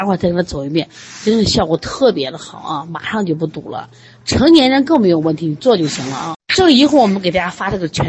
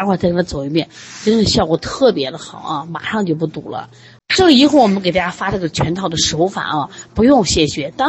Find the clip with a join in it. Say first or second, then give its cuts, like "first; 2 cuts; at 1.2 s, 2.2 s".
second; 1 cut; at 4.2 s